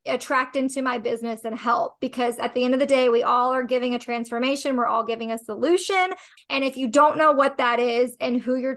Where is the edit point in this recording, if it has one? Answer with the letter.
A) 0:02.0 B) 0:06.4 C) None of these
B